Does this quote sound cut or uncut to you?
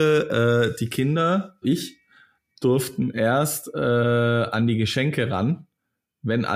cut